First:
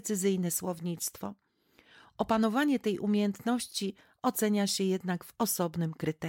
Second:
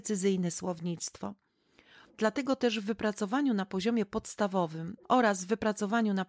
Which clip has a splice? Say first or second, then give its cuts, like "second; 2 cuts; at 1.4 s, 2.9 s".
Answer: second; 2 cuts; at 2.0 s, 5.0 s